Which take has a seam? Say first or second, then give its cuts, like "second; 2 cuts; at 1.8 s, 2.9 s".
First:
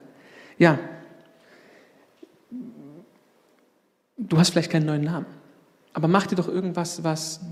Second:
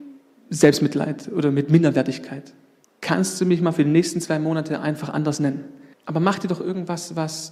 second; 2 cuts; at 2.8 s, 5.9 s